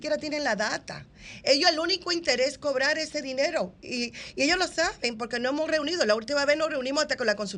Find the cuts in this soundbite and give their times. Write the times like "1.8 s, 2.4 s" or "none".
none